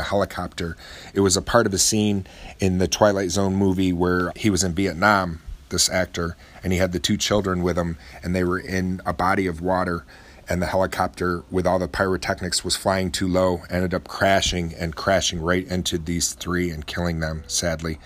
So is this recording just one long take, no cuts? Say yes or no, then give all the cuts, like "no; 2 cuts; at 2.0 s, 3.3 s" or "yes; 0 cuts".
no; 1 cut; at 4.3 s